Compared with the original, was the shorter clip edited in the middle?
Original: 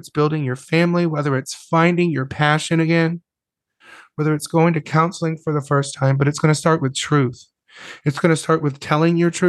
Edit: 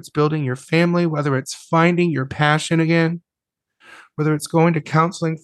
no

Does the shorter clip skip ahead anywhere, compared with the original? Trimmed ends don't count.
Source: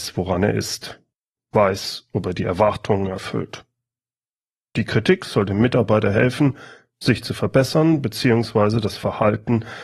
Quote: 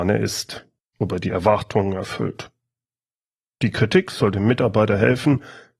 yes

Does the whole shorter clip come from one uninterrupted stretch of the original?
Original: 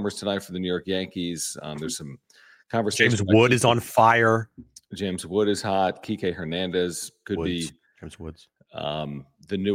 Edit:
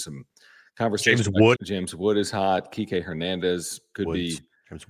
no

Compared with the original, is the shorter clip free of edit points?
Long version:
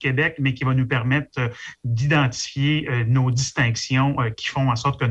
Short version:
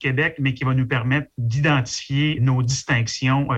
no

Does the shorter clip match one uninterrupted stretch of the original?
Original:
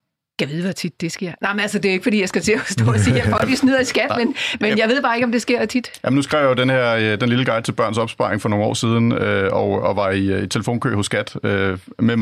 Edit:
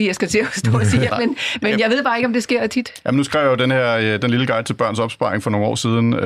no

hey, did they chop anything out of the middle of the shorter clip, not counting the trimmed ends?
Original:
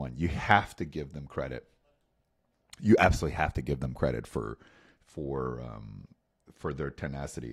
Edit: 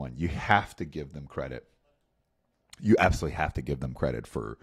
no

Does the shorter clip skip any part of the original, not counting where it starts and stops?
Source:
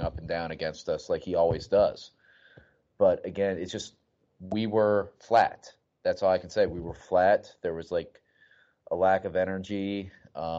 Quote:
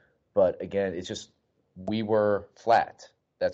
no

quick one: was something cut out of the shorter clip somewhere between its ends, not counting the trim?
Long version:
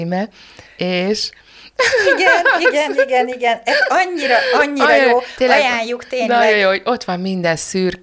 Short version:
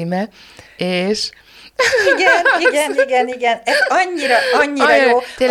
no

